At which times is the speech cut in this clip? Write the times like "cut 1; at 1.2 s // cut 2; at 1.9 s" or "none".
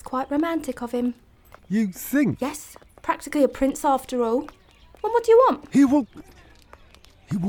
cut 1; at 1.6 s

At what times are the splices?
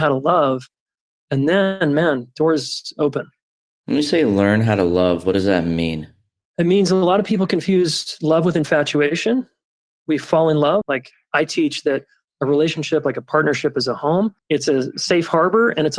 cut 1; at 10.8 s // cut 2; at 14.4 s

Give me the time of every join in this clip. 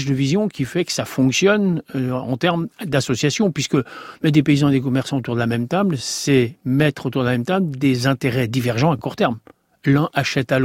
none

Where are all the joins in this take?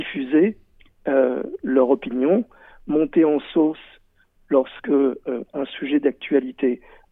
none

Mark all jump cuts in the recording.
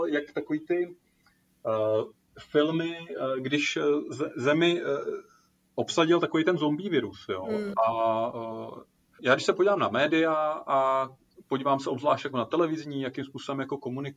cut 1; at 7.7 s // cut 2; at 9.2 s

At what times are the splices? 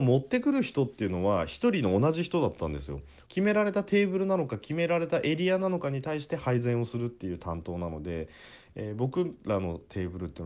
cut 1; at 3.3 s

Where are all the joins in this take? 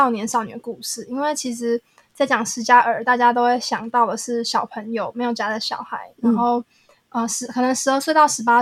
none

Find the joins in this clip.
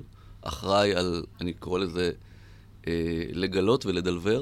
cut 1; at 1.3 s

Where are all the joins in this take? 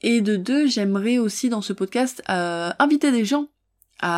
none

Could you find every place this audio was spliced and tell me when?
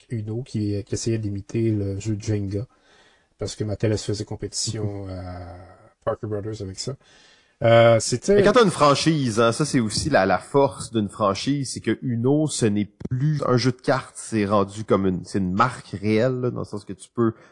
cut 1; at 13.4 s

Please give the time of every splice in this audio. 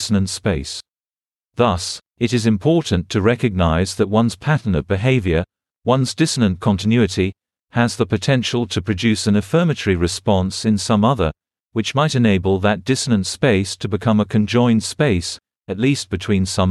none

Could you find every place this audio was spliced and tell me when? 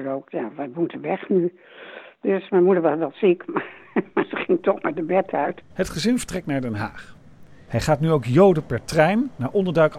cut 1; at 5.7 s // cut 2; at 7.7 s

